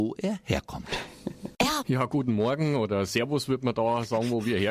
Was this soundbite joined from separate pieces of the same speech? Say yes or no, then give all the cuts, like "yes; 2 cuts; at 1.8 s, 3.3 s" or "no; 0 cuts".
yes; 1 cut; at 1.8 s